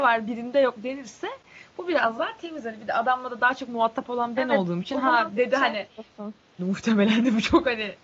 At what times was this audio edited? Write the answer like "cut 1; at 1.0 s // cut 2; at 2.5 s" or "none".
cut 1; at 6.6 s